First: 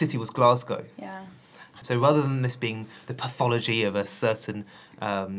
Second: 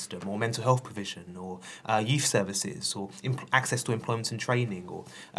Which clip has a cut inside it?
first; 1 cut; at 1.8 s

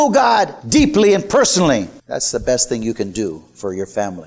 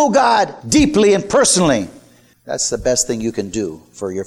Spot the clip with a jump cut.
first; 1 cut; at 2.0 s

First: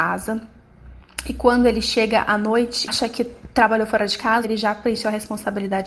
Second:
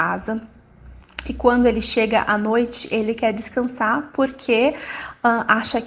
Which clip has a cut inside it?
first; 2 cuts; at 2.9 s, 4.4 s

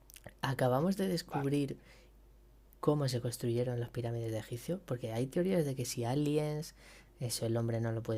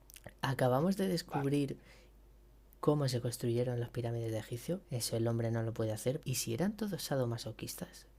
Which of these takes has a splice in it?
second; 2 cuts; at 4.8 s, 6.2 s

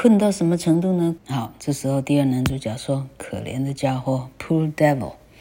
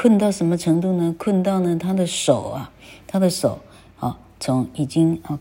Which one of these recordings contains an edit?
first; 1 cut; at 1.2 s

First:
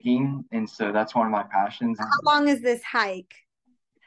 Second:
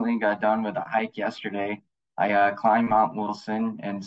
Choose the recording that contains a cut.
first; 1 cut; at 2.0 s

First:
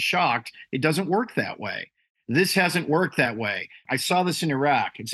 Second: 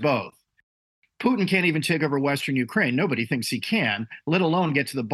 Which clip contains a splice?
first; 1 cut; at 3.9 s

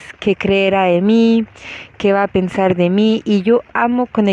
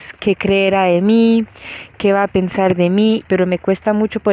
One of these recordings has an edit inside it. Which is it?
second; 1 cut; at 3.2 s

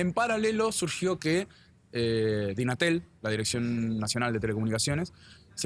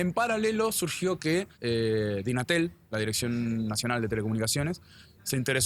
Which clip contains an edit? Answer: second; 1 cut; at 1.5 s

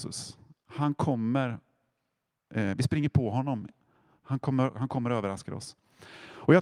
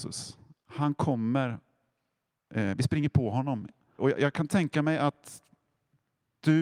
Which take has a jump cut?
second; 1 cut; at 4.0 s

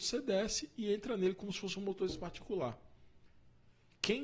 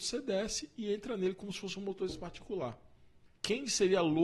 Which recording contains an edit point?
second; 1 cut; at 3.3 s

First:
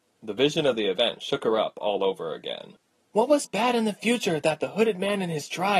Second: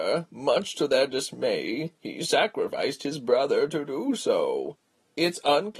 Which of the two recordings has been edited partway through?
first; 1 cut; at 3.4 s

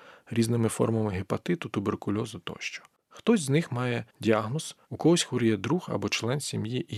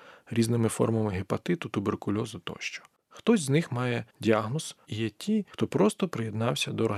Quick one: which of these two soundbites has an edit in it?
second; 1 cut; at 4.9 s

